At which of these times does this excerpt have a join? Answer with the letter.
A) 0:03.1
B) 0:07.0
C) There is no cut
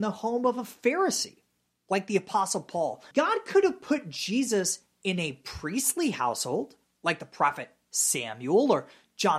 A